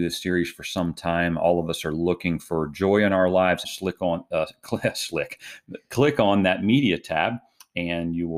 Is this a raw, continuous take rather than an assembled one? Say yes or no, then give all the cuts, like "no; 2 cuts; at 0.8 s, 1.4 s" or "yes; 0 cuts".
no; 1 cut; at 3.6 s